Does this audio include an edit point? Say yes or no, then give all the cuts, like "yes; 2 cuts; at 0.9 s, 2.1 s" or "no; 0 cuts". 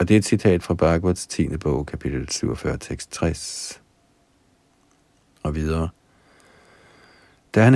no; 0 cuts